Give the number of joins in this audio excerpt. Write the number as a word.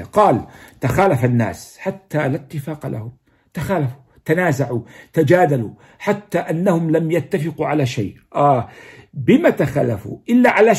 zero